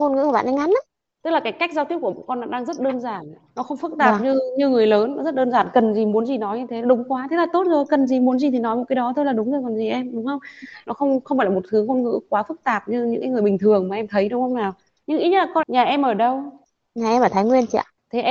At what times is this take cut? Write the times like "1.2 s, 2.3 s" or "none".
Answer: 15.6 s